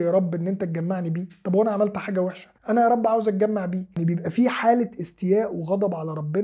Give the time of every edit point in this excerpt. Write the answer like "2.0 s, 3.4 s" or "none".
2.6 s

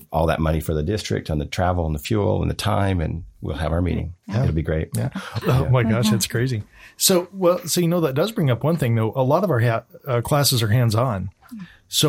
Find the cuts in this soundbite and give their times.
5.4 s

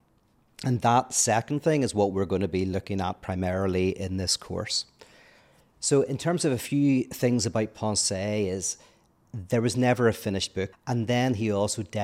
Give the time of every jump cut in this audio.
10.7 s

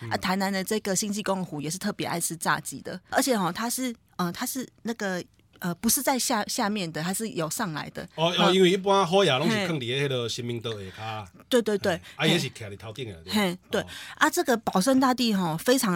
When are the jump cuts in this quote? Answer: 3.1 s

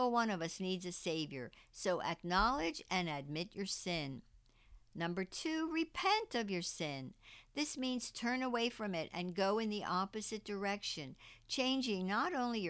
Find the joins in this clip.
none

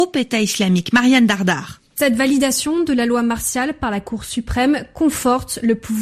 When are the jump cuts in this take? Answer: none

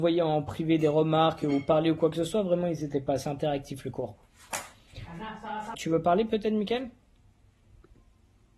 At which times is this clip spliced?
5.7 s

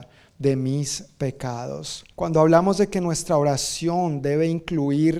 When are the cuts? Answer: 2.1 s

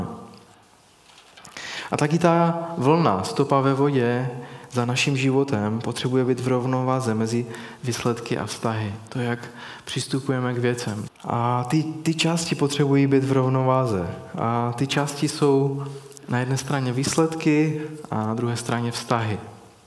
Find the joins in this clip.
11.1 s

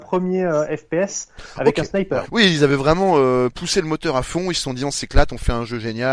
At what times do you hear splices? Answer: 2.3 s

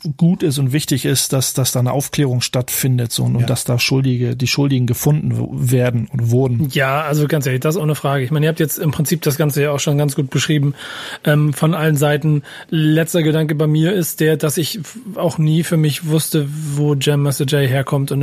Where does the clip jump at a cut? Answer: none

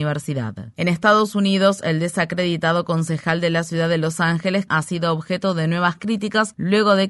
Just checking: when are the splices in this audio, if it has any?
4.7 s

